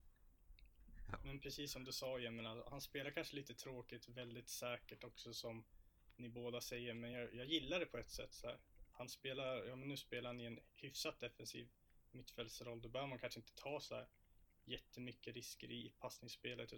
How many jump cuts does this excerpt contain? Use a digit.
0